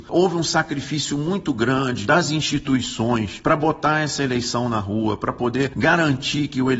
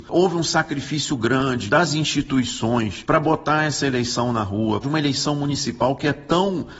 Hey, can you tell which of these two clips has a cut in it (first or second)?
second